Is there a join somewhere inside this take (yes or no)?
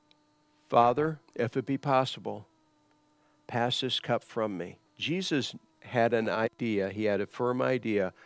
yes